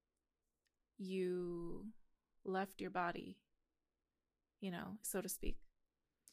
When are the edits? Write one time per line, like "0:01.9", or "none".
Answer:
0:05.0